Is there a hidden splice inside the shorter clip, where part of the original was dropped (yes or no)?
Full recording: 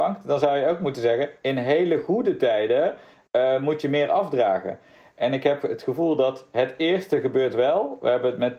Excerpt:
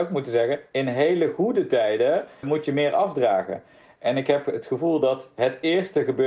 yes